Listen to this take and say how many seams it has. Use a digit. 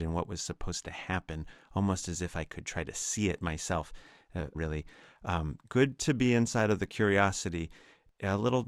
1